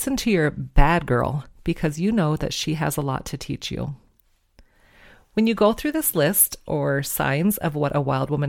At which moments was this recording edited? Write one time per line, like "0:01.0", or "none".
none